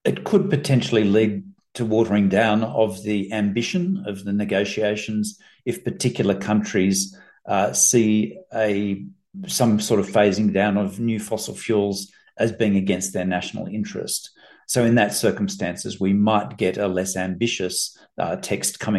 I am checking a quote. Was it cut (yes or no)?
no